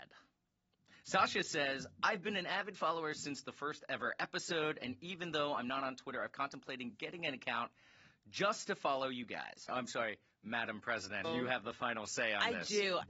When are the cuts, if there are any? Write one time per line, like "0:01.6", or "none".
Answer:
0:09.7
0:11.2